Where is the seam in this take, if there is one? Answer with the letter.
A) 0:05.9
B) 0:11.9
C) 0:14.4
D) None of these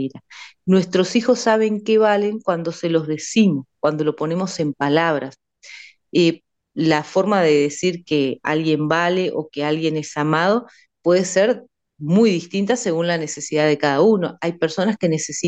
D